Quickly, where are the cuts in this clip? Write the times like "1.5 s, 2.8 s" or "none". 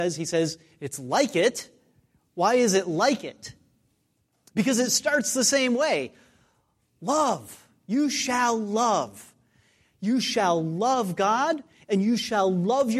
none